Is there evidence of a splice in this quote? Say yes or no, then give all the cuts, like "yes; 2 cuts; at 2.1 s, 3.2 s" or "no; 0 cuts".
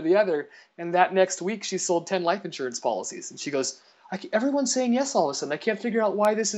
no; 0 cuts